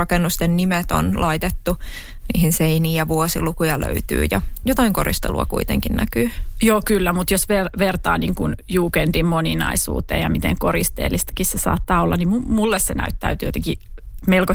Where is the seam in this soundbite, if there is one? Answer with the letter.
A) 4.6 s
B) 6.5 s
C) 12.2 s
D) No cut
A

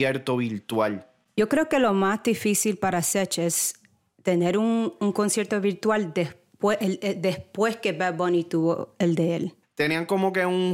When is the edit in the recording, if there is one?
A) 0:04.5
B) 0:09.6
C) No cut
B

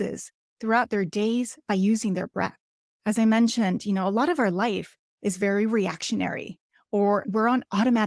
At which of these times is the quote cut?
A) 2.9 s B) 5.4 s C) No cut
C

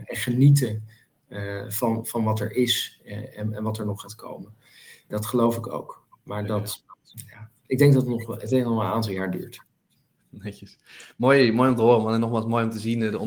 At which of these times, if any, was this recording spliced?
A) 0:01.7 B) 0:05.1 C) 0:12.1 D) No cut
B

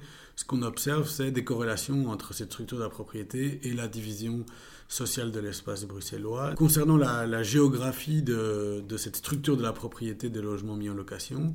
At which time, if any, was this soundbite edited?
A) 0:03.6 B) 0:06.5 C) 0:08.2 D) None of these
B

